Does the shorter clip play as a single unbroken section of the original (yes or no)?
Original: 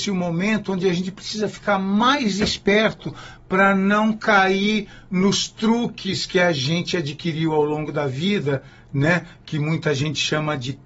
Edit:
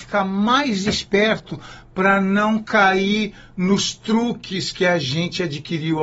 yes